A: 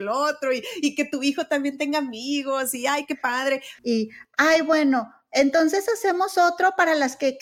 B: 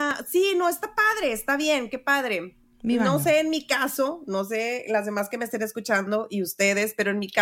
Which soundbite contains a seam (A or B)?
A